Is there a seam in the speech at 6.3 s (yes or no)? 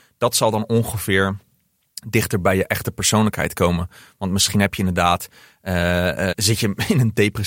yes